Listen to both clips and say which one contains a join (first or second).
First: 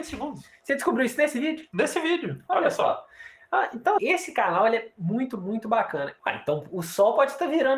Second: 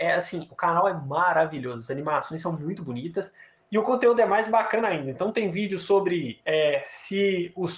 first